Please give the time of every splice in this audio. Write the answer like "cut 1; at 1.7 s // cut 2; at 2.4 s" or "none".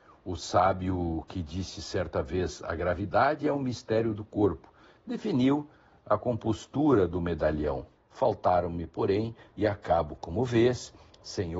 cut 1; at 8.0 s // cut 2; at 9.5 s